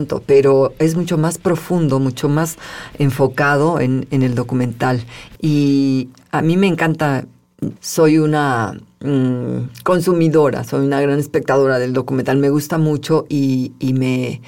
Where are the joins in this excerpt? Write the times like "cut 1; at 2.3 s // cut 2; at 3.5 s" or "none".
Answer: cut 1; at 5.4 s // cut 2; at 7.8 s // cut 3; at 13.3 s